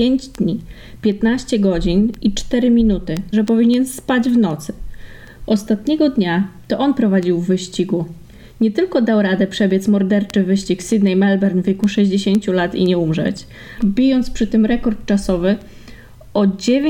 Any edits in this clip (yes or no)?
yes